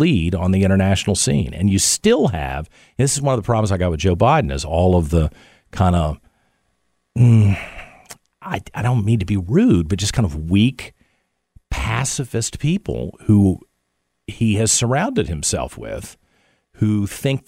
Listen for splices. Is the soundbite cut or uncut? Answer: uncut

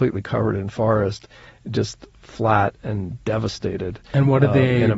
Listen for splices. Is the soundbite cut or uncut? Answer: uncut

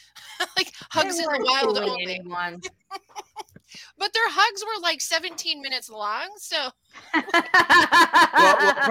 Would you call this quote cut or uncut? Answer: uncut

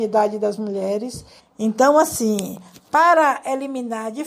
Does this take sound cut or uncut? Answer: cut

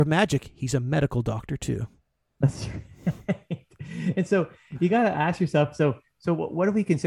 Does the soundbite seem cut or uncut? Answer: uncut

